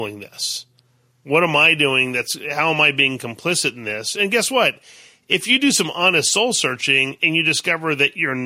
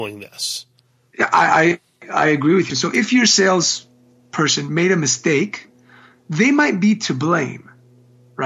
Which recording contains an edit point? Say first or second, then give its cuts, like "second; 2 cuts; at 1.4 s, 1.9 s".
second; 2 cuts; at 1.1 s, 2.7 s